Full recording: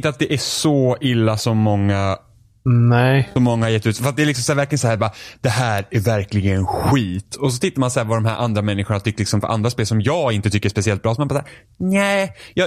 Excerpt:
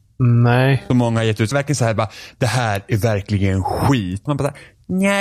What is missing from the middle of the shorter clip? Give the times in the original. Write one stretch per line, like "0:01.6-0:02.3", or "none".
0:04.0-0:04.5
0:07.3-0:11.2